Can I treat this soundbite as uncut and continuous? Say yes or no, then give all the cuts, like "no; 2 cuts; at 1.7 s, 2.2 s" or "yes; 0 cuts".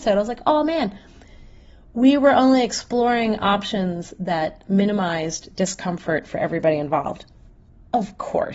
yes; 0 cuts